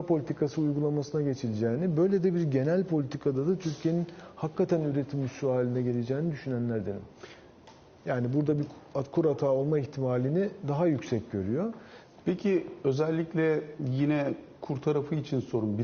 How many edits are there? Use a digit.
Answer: 2